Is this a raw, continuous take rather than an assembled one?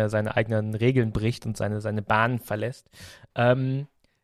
no; 1 cut; at 3.3 s

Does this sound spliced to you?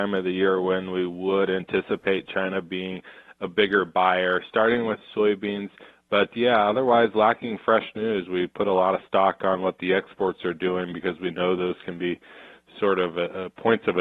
yes; 1 cut; at 5.9 s

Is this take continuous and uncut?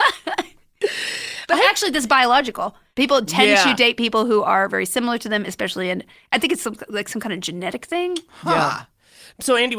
yes; 0 cuts

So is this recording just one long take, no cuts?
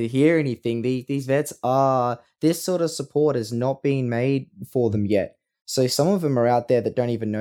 yes; 0 cuts

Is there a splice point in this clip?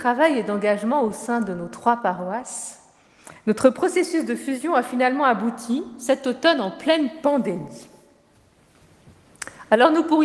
no; 0 cuts

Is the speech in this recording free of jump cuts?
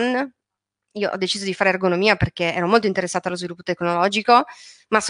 yes; 0 cuts

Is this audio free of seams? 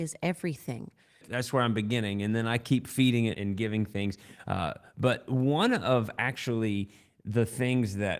no; 2 cuts; at 1.2 s, 3.3 s

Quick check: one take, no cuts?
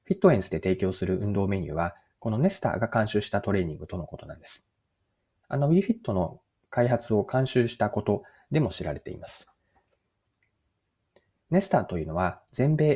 no; 2 cuts; at 5.4 s, 11.4 s

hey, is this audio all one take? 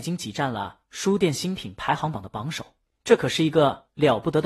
yes; 0 cuts

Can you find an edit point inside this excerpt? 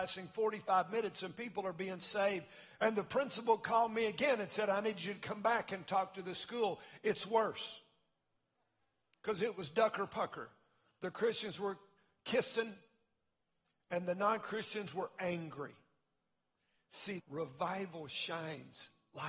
yes; 1 cut; at 17.2 s

